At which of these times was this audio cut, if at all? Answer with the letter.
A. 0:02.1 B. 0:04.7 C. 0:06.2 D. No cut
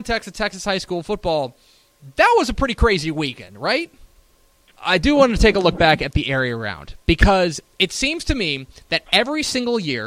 B